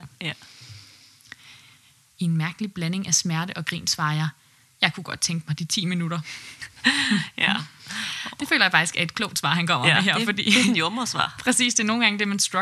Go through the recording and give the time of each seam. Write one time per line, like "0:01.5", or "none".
0:02.1